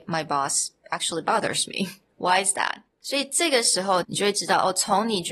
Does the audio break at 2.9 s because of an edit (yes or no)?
yes